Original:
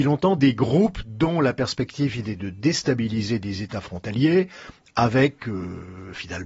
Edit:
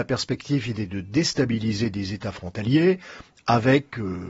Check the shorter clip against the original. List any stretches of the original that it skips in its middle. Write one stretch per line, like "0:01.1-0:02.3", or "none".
none